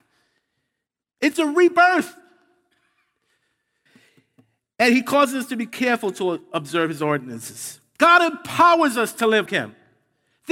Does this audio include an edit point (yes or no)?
yes